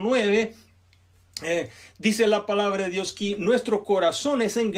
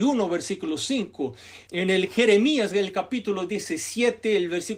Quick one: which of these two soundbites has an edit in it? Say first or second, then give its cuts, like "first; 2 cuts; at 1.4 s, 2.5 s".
second; 1 cut; at 1.7 s